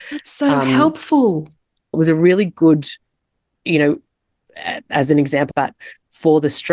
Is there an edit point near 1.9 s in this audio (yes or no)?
yes